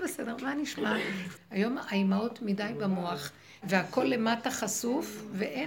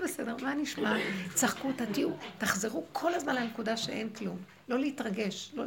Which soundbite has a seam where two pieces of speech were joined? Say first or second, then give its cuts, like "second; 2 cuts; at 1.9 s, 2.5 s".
first; 2 cuts; at 1.3 s, 3.6 s